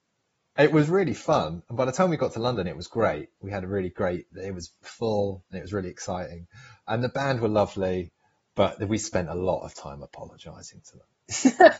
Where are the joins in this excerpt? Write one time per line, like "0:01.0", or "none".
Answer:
none